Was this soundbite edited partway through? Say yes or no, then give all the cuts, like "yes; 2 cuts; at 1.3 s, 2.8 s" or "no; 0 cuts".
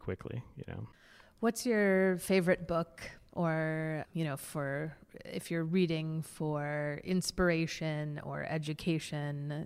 yes; 1 cut; at 4.0 s